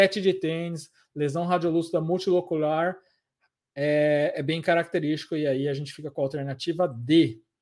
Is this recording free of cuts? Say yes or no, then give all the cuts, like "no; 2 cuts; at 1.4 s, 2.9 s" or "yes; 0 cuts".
yes; 0 cuts